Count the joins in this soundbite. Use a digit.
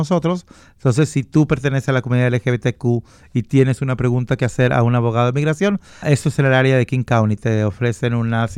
1